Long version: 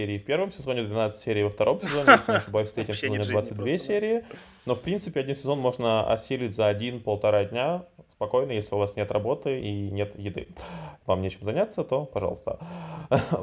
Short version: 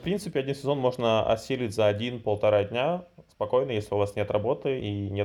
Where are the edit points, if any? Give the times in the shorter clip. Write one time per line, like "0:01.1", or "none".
none